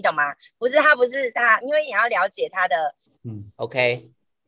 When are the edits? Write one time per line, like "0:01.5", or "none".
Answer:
0:01.6
0:03.1

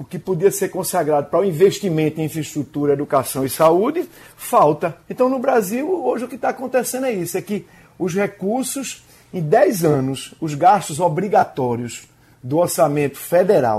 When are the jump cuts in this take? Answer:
0:05.0

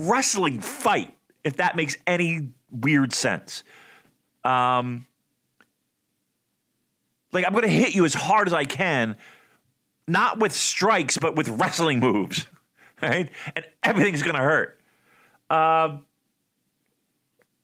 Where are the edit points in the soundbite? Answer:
none

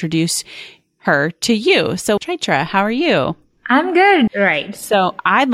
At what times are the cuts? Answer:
0:02.2
0:04.3

